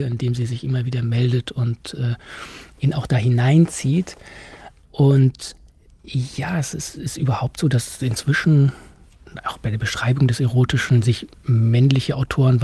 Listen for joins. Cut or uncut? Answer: uncut